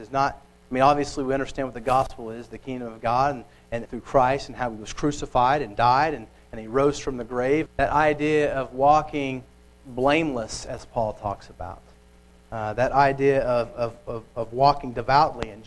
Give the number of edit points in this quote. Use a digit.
2